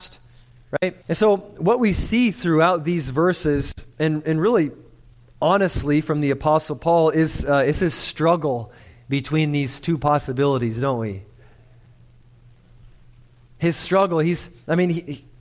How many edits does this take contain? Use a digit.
1